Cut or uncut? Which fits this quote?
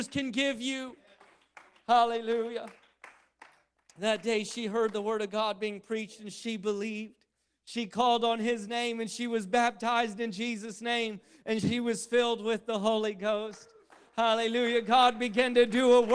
uncut